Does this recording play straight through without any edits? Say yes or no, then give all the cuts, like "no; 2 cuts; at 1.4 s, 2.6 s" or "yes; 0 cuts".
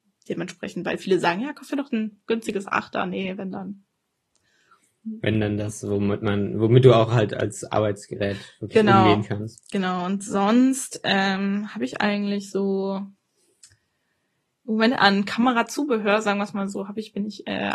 yes; 0 cuts